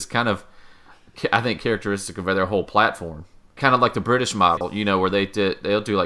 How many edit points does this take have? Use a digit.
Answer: 1